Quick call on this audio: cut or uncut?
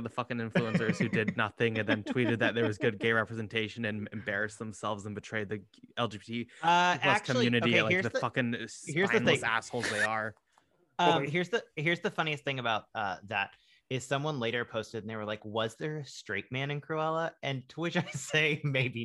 uncut